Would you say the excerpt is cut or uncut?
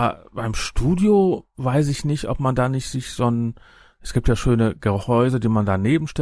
uncut